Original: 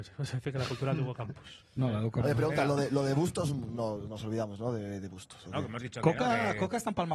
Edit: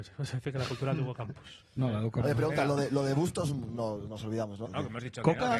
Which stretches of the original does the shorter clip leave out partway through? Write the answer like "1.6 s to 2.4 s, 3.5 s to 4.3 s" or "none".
4.6 s to 5.4 s